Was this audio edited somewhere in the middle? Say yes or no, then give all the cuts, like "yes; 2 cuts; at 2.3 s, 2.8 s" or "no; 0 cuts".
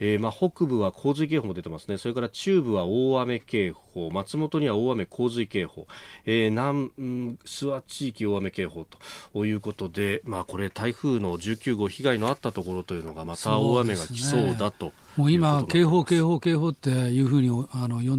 no; 0 cuts